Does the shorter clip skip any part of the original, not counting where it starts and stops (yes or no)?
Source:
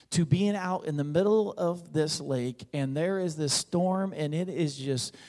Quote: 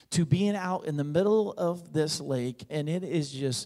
yes